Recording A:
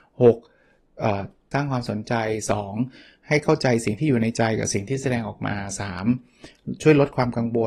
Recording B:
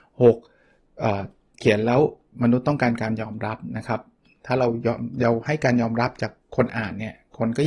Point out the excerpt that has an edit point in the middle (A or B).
A